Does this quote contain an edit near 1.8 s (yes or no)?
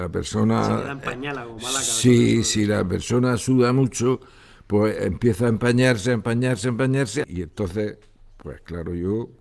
no